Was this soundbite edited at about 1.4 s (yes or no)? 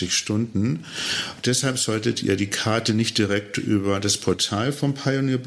yes